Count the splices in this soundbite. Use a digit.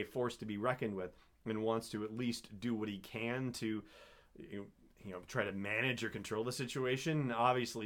0